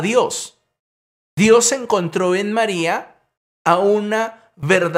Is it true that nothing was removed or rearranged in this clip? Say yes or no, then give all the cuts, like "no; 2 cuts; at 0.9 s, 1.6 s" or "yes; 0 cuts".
no; 1 cut; at 1.1 s